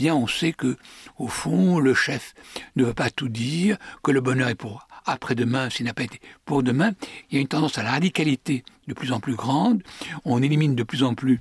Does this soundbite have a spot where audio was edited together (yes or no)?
yes